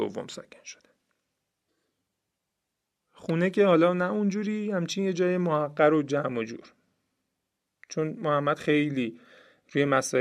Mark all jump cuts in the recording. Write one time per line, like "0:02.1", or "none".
none